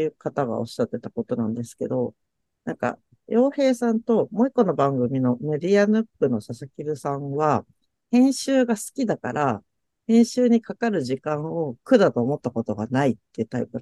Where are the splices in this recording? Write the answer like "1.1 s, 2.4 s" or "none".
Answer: none